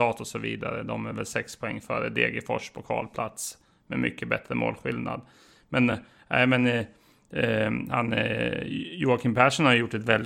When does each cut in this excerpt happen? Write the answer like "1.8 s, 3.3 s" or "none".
none

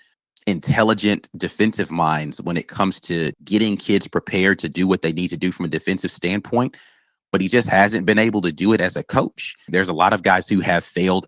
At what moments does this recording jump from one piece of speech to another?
3.3 s, 9.7 s

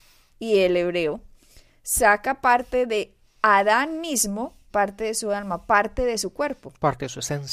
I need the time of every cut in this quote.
4.7 s

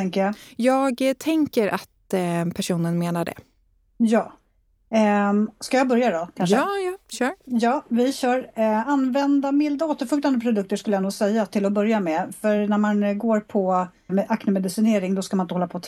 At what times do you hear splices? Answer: 14.1 s

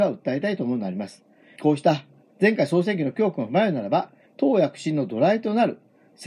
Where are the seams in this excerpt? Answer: 1.6 s, 4.3 s

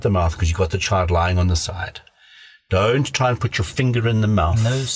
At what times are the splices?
none

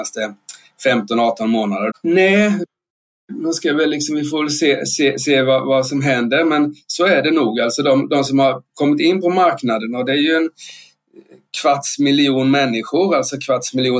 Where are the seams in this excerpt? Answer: 1.9 s

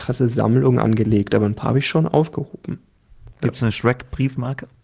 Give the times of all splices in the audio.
3.3 s

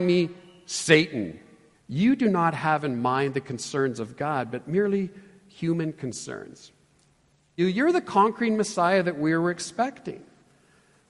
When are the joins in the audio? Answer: 1.7 s, 7.6 s

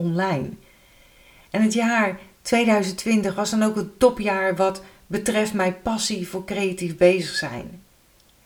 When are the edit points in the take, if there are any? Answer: 1.4 s

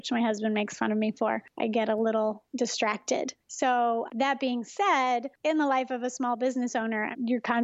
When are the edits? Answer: none

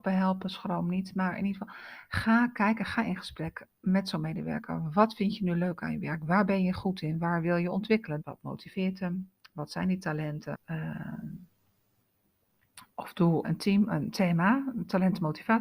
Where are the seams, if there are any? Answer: 8.2 s, 10.5 s, 13.4 s

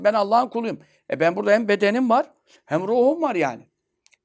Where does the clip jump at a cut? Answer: none

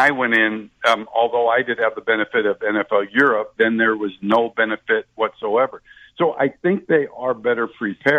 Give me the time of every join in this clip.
3.6 s

